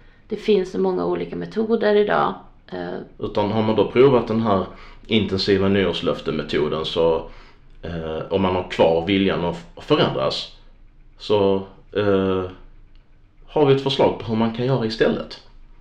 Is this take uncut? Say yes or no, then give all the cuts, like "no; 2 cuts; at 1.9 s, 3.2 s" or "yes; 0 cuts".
no; 1 cut; at 3.2 s